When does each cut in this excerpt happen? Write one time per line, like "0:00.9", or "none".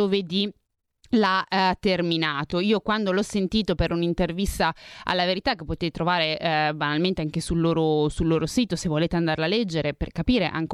none